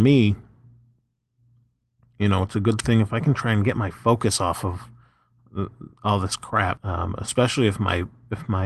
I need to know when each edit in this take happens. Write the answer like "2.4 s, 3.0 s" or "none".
6.8 s